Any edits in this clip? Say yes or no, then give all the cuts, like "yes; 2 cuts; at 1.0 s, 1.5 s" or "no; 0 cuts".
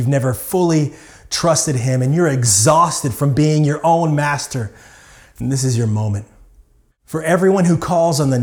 yes; 1 cut; at 6.9 s